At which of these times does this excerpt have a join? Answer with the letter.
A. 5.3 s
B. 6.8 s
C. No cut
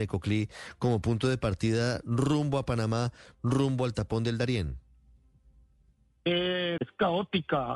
B